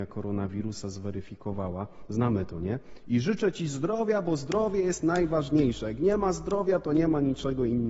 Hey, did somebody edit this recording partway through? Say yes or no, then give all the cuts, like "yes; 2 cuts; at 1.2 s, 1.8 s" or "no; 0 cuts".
no; 0 cuts